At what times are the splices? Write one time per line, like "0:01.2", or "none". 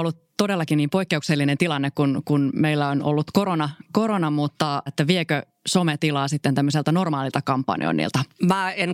0:04.9